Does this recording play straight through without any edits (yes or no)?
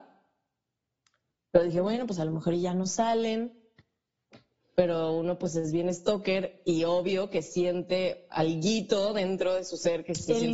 yes